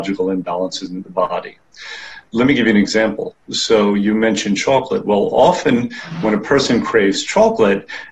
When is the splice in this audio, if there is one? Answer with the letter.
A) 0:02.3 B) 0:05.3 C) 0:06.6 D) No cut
A